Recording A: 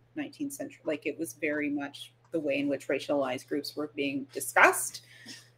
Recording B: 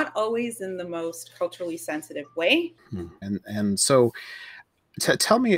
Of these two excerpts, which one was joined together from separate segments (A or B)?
B